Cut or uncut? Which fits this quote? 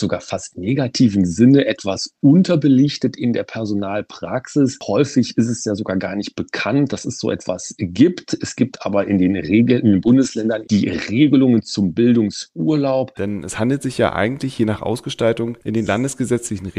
cut